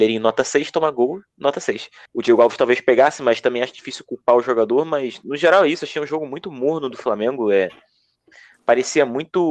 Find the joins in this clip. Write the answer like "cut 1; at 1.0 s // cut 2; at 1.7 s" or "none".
cut 1; at 2.1 s